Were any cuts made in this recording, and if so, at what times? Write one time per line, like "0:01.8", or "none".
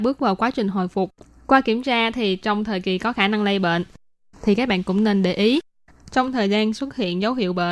0:04.3
0:05.9